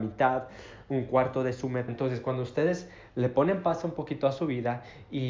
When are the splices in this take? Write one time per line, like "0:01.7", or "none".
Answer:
0:01.9